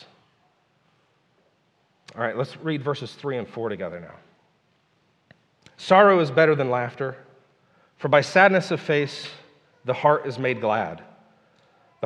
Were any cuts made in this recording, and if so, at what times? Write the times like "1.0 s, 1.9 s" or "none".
none